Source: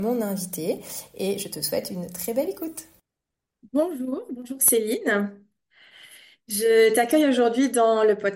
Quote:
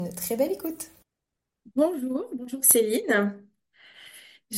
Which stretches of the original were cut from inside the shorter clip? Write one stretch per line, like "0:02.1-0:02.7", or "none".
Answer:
none